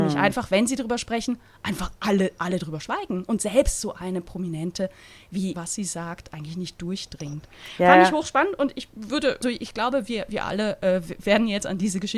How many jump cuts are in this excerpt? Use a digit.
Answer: 2